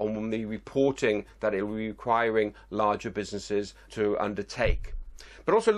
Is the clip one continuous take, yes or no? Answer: no